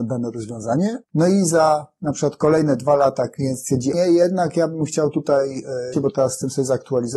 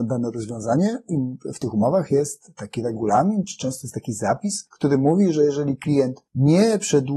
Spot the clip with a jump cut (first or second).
first